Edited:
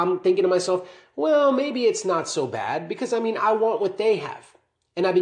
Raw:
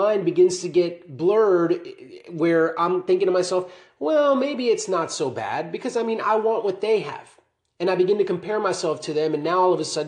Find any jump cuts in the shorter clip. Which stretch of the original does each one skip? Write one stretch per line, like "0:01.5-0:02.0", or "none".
none